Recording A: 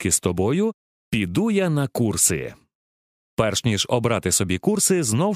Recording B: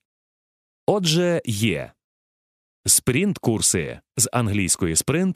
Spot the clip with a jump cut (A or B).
A